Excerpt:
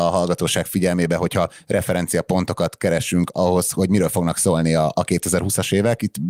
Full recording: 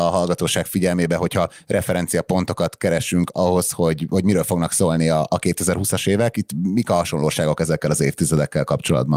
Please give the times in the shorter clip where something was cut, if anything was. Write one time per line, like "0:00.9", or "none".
0:03.7